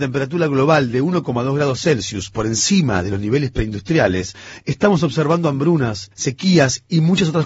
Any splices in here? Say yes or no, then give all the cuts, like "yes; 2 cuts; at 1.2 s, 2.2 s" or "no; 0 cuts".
yes; 1 cut; at 6.1 s